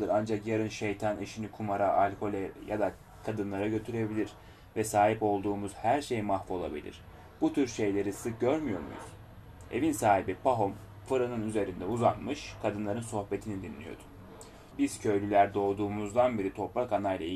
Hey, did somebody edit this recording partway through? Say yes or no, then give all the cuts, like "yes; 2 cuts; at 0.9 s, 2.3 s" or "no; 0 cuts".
yes; 2 cuts; at 8.1 s, 14.7 s